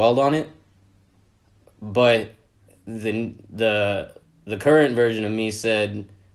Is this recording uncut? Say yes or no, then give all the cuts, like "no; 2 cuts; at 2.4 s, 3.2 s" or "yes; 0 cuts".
yes; 0 cuts